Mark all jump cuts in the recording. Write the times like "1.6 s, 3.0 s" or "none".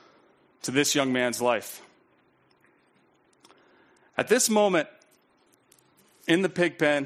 none

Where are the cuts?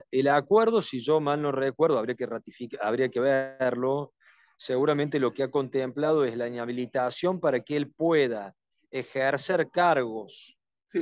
none

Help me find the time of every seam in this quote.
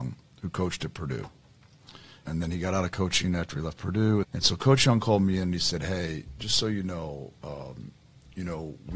2.2 s, 4.2 s

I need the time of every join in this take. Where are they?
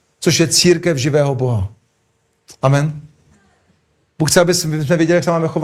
none

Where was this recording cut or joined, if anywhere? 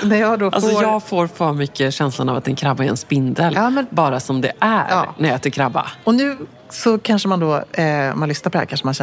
none

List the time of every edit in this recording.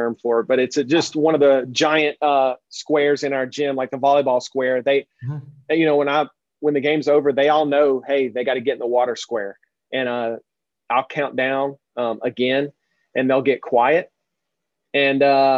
none

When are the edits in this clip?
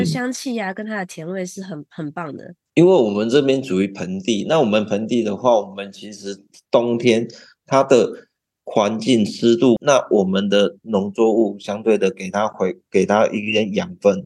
9.8 s

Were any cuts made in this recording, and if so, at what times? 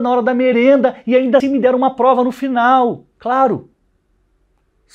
1.4 s

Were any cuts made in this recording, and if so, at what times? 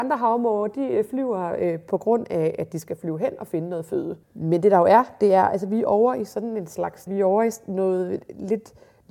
4.2 s, 7.1 s

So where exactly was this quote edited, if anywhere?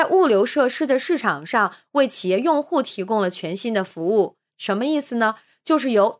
4.5 s

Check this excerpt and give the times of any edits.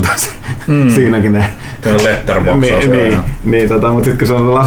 none

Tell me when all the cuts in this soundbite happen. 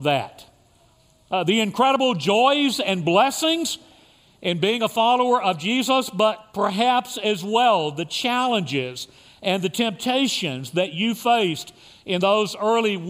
none

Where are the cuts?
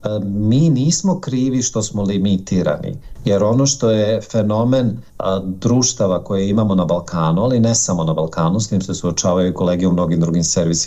5.1 s

